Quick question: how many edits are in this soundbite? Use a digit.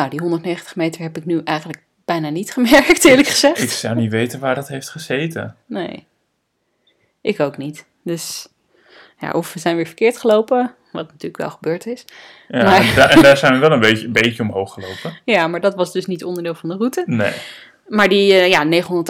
0